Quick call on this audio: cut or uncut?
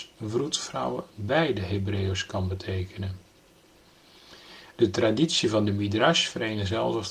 cut